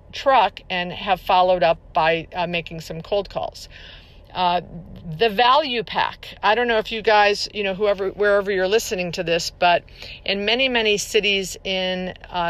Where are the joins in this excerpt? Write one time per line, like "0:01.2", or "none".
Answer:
none